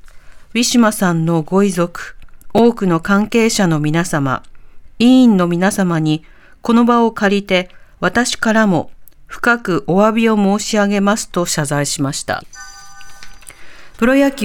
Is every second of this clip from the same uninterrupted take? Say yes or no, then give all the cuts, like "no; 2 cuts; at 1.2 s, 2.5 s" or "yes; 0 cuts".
yes; 0 cuts